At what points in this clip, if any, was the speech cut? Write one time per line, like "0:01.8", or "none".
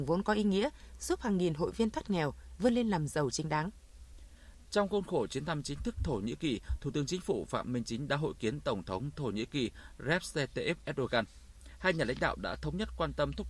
0:04.6